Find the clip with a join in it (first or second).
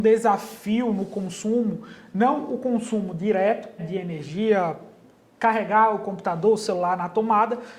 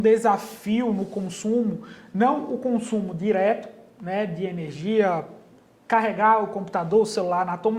first